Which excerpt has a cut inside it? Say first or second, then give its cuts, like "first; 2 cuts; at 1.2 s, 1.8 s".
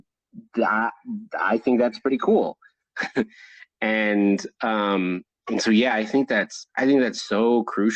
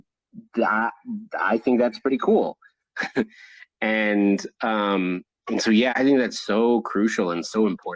second; 1 cut; at 5.9 s